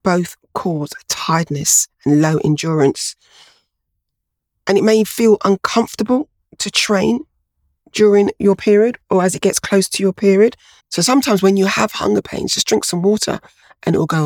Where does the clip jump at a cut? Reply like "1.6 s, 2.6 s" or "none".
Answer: 10.8 s